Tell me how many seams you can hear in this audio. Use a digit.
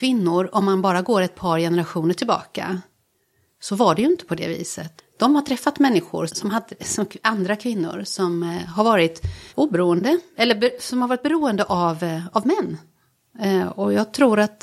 3